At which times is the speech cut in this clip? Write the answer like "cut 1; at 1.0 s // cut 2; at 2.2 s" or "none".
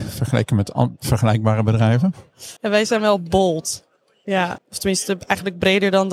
cut 1; at 2.6 s // cut 2; at 4.6 s